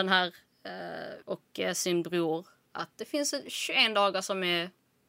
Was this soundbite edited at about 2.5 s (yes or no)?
no